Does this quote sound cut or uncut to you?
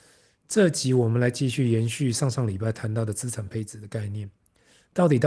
uncut